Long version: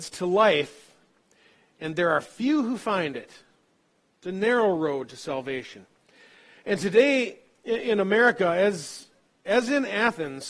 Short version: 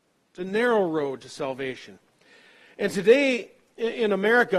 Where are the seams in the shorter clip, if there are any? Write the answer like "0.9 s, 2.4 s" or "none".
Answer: none